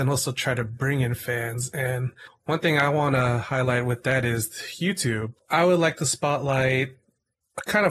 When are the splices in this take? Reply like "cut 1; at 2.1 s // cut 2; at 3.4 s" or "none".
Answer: cut 1; at 5.4 s